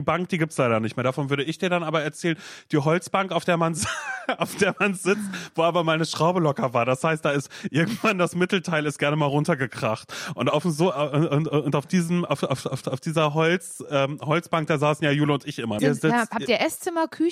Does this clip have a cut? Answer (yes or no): yes